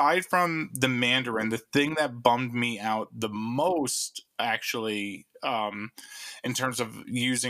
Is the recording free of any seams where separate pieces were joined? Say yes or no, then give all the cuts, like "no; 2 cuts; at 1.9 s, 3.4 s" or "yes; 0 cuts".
yes; 0 cuts